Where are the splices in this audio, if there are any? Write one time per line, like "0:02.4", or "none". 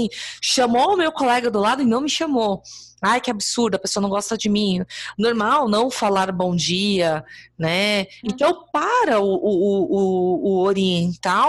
0:05.1
0:08.2